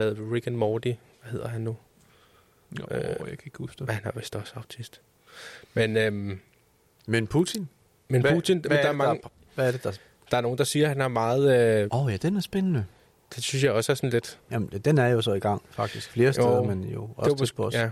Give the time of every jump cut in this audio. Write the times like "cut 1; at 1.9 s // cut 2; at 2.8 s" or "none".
cut 1; at 11.9 s // cut 2; at 14.5 s